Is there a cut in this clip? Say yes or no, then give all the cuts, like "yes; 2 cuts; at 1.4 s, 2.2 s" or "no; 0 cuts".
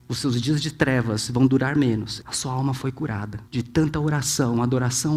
yes; 2 cuts; at 2.2 s, 3.5 s